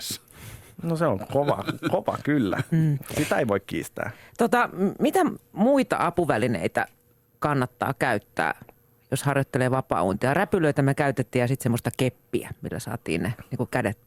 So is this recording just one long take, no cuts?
yes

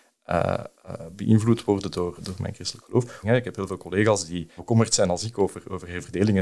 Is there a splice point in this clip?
yes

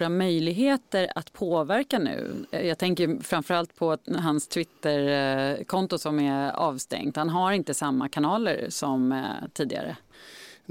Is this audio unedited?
yes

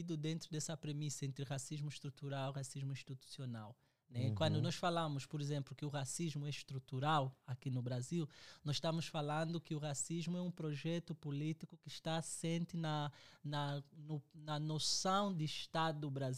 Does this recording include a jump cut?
no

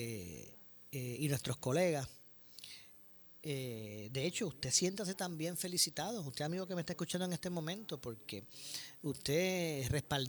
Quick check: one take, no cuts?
yes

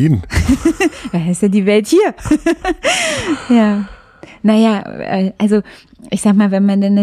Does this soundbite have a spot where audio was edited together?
no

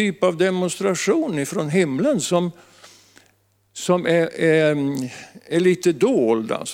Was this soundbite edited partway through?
no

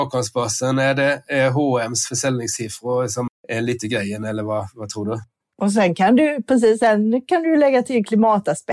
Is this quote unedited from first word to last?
no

